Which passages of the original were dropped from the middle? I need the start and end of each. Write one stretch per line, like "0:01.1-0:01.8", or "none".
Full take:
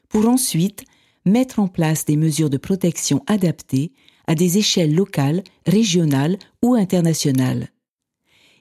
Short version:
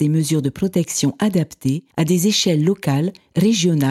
0:04.0-0:04.2

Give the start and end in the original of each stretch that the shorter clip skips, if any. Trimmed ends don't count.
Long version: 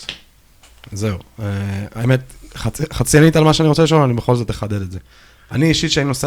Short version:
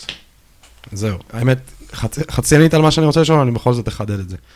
0:01.3-0:01.9

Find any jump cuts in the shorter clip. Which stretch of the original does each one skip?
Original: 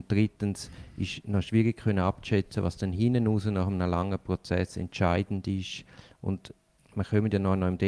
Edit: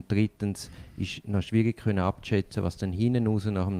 none

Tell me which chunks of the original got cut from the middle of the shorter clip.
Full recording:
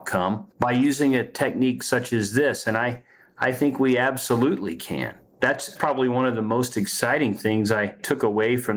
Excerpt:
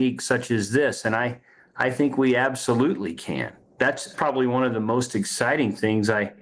none

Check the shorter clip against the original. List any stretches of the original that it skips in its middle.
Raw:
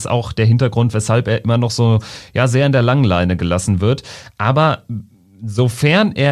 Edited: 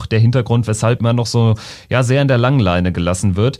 0:01.2-0:01.4

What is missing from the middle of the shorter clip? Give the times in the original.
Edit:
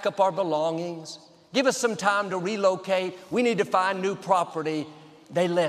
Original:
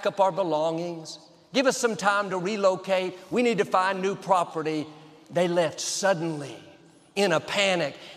none

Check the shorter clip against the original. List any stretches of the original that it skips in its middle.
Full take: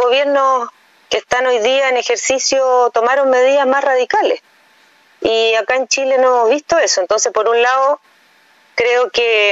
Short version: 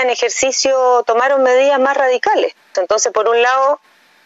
0:04.6-0:06.9

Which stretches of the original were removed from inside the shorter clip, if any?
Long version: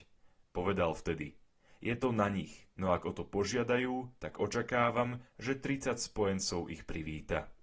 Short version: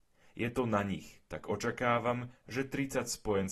0:02.7-0:04.2

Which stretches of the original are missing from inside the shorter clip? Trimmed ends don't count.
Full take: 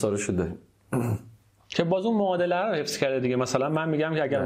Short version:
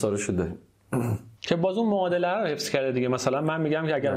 0:01.4-0:01.6

